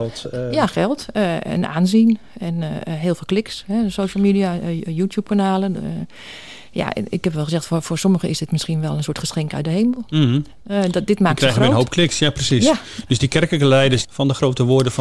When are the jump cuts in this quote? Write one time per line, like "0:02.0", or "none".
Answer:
0:14.0